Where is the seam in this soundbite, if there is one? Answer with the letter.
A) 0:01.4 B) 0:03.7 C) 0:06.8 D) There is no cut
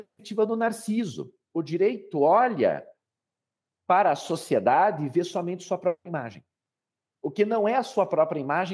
D